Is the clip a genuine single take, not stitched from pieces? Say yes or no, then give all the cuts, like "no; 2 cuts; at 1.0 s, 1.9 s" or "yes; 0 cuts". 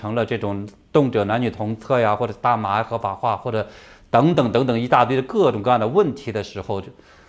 yes; 0 cuts